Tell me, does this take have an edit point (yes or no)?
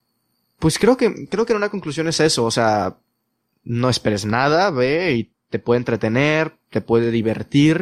no